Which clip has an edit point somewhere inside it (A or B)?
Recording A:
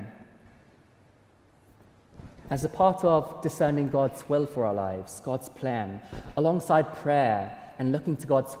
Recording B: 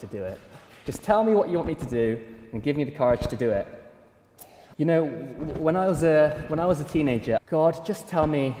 B